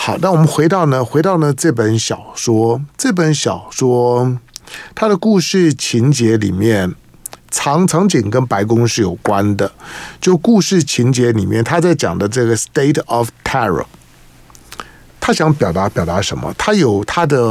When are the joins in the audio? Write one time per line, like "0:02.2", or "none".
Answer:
none